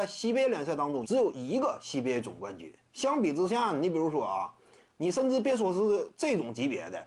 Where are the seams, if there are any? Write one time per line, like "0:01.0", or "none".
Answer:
0:01.0
0:04.9